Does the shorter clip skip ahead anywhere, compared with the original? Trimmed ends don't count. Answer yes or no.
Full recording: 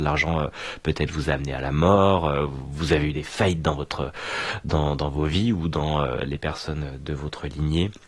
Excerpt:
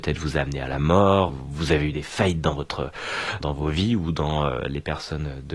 yes